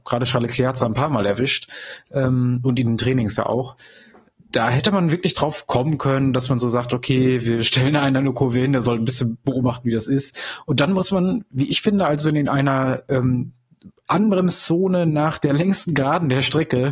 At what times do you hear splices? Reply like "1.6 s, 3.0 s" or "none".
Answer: none